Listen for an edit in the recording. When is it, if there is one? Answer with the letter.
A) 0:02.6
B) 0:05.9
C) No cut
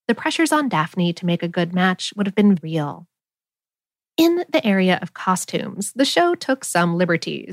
A